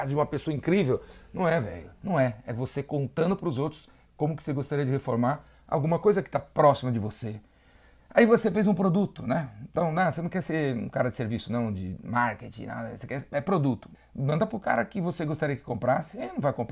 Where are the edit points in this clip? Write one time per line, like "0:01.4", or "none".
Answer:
0:13.9